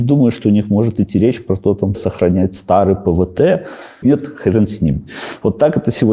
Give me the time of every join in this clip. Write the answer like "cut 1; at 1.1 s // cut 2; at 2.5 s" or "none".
cut 1; at 1.9 s // cut 2; at 4.0 s